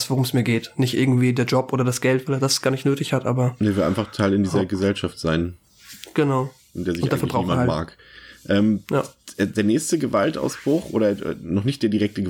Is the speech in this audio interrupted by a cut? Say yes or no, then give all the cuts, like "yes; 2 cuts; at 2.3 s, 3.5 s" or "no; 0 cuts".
no; 0 cuts